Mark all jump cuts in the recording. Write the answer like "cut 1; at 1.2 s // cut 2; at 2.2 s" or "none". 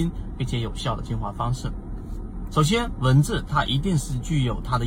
cut 1; at 2.5 s

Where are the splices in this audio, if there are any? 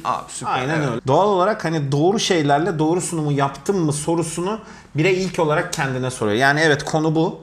cut 1; at 1.0 s

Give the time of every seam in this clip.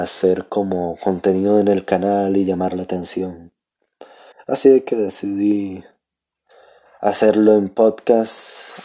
cut 1; at 4.3 s

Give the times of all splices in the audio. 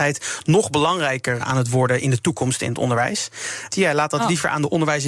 cut 1; at 1.4 s // cut 2; at 3.7 s

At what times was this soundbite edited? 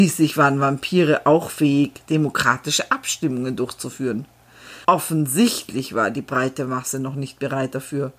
cut 1; at 4.8 s

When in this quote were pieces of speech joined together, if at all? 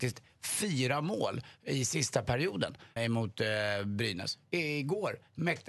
cut 1; at 3.0 s

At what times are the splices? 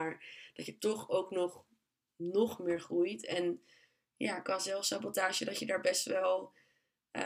none

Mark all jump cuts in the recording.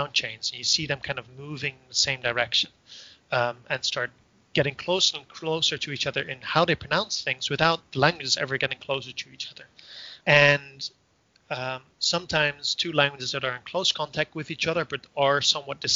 cut 1; at 10.2 s // cut 2; at 11.9 s

